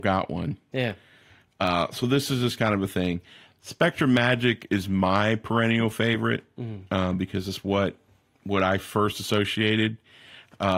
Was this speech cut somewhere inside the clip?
no; 0 cuts

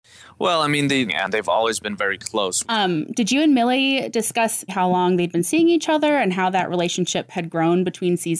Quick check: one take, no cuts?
no; 3 cuts; at 1.1 s, 2.6 s, 4.7 s

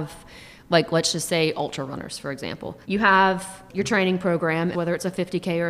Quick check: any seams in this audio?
yes; 2 cuts; at 2.8 s, 4.7 s

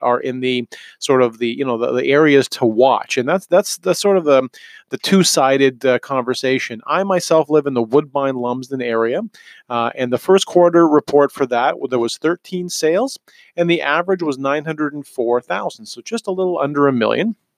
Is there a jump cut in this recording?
no; 0 cuts

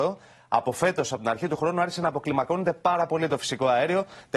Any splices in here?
no; 0 cuts

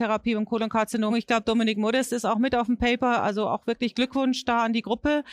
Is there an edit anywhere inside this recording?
yes; 1 cut; at 1.1 s

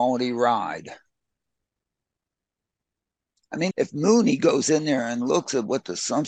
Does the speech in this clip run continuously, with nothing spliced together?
no; 1 cut; at 3.7 s

